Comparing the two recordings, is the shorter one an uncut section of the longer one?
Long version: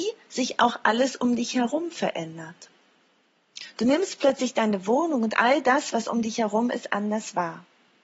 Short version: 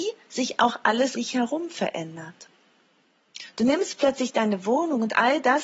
no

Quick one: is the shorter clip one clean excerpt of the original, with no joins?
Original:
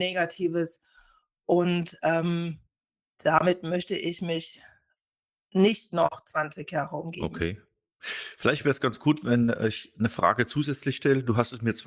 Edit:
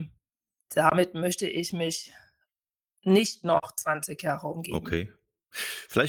yes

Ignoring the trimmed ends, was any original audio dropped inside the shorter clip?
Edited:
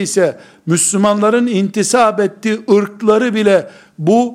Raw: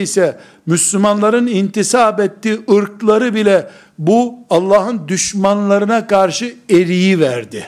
no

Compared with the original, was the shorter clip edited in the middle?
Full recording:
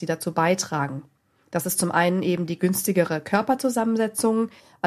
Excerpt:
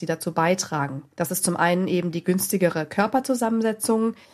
yes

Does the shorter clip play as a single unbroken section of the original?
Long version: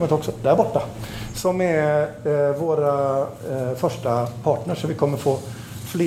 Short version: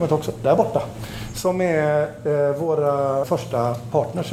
no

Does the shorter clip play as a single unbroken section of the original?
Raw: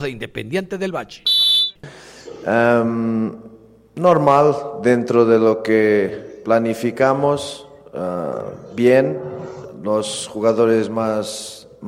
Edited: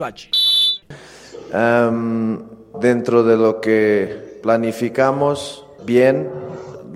no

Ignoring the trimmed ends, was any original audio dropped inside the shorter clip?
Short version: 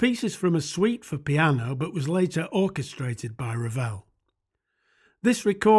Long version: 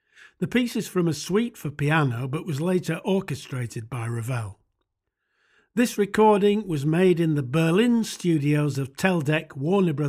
no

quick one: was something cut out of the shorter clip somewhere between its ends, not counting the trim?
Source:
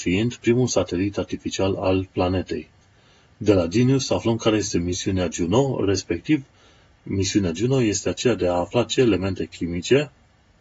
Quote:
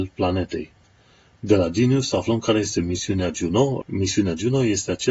yes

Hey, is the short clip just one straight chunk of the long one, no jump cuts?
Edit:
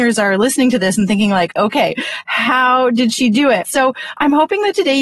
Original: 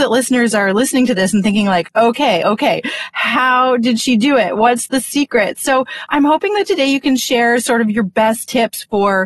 no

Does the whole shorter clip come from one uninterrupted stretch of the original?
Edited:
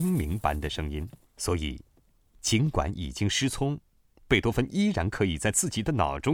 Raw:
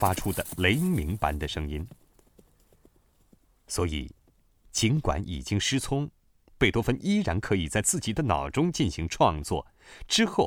no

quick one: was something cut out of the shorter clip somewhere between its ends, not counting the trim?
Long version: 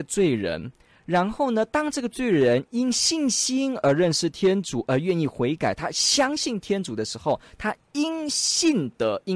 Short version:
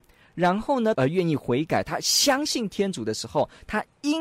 yes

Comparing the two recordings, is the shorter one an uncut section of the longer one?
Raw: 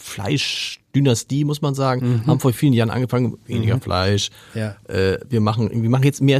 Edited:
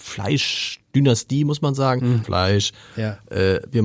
no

